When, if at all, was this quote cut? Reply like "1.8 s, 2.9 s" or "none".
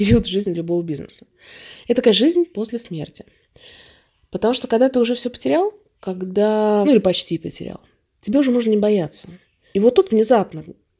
6.8 s, 9.7 s